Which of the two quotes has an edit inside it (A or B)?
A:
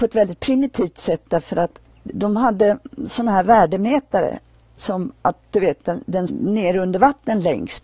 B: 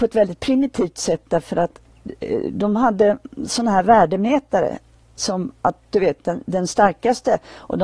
A